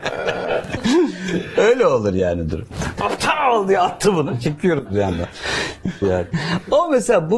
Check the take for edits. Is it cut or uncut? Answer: cut